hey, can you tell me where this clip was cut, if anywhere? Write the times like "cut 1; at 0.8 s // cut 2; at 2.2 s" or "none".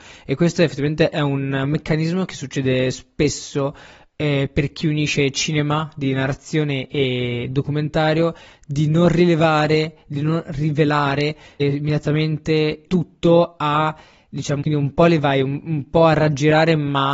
cut 1; at 11.6 s // cut 2; at 12.9 s // cut 3; at 14.6 s